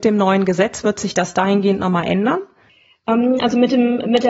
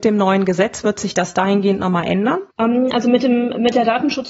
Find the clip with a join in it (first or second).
second